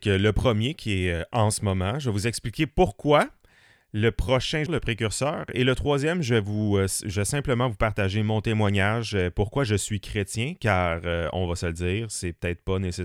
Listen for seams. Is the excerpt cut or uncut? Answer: cut